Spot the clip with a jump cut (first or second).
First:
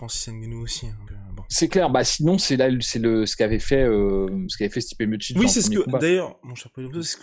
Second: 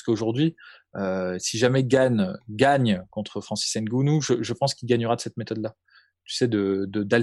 first